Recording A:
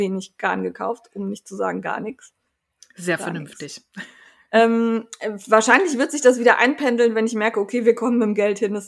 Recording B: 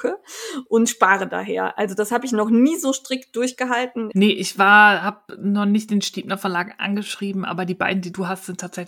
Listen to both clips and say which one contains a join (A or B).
B